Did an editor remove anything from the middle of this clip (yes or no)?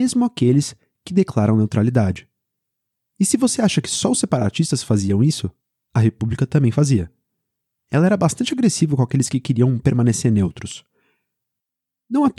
no